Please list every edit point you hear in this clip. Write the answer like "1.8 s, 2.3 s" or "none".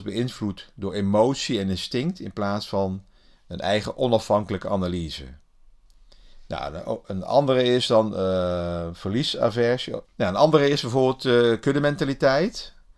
10.1 s